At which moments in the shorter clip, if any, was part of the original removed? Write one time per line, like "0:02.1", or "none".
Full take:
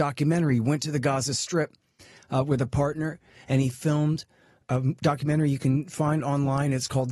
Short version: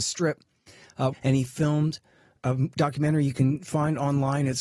0:01.1